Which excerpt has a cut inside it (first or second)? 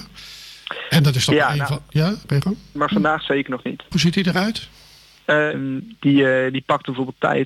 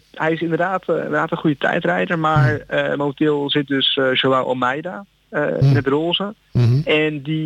first